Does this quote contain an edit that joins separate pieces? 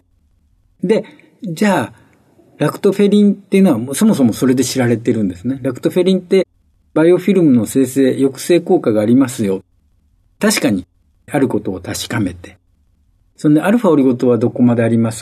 no; 0 cuts

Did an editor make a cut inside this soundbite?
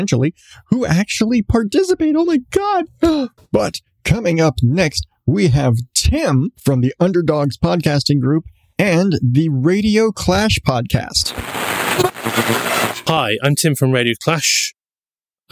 yes; 2 cuts; at 3.4 s, 6.6 s

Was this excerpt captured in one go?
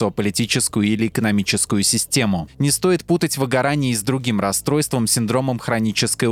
yes; 0 cuts

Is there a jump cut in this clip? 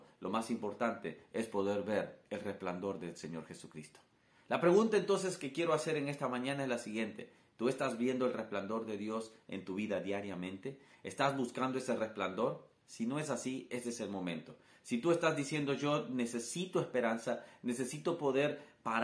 no; 0 cuts

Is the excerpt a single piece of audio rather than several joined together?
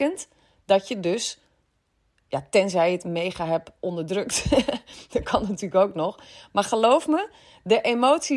yes; 0 cuts

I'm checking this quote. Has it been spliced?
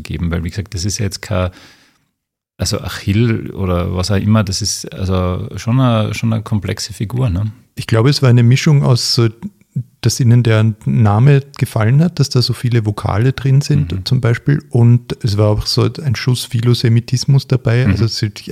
no; 0 cuts

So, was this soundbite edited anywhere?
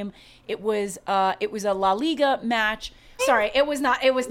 yes; 1 cut; at 3.2 s

